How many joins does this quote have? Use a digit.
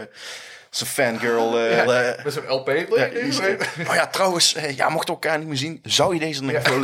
1